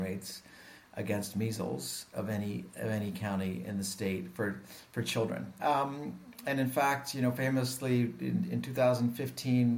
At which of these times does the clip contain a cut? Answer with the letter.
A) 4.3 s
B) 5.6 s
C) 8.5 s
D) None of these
B